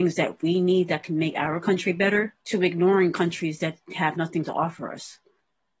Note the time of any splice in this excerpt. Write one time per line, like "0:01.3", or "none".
0:02.4